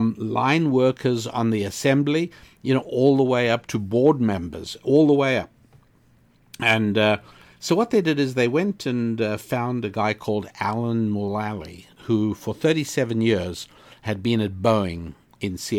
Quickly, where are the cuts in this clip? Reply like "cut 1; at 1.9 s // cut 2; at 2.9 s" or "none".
none